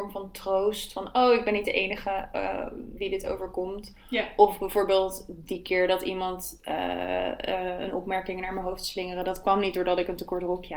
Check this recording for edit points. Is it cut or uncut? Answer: uncut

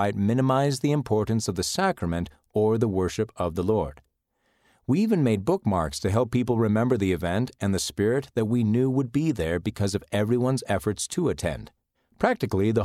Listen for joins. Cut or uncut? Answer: cut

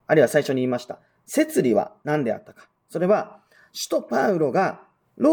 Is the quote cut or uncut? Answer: uncut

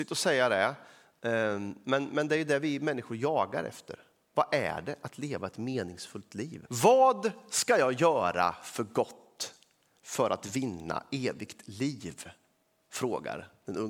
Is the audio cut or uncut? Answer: cut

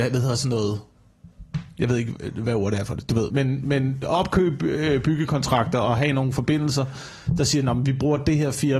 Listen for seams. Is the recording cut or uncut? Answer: cut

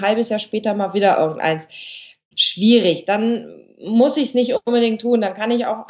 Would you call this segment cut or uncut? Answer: cut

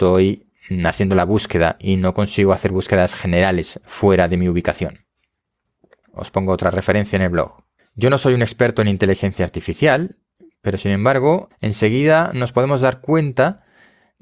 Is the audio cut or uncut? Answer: cut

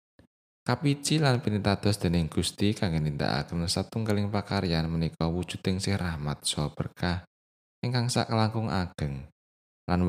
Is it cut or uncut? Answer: uncut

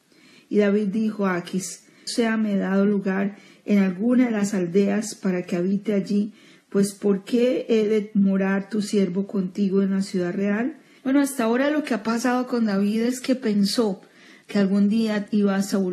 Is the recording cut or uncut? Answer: cut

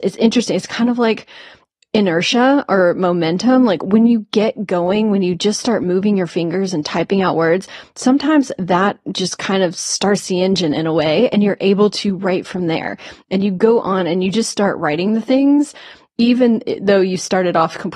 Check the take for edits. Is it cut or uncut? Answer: uncut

